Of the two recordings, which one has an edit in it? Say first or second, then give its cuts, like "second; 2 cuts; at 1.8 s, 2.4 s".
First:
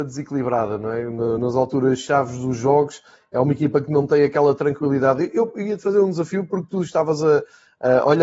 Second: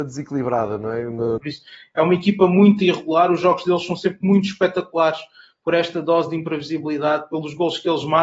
second; 1 cut; at 1.4 s